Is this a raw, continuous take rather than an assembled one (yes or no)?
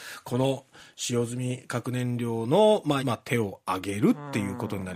no